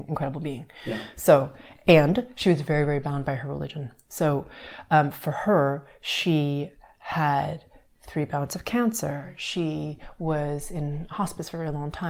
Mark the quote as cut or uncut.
uncut